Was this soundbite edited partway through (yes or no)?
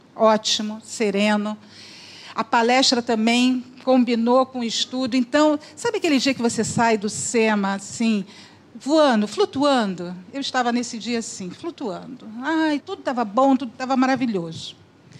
yes